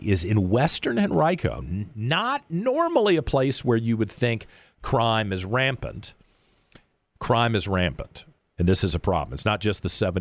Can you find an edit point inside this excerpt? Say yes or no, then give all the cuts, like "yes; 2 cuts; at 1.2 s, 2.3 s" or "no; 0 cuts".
no; 0 cuts